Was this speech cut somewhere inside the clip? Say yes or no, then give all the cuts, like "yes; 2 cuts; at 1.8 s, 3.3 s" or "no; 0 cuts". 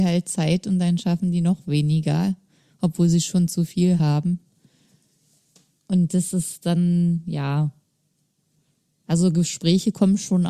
no; 0 cuts